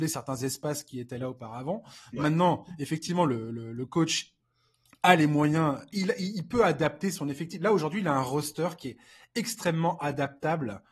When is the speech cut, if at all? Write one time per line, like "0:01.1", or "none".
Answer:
none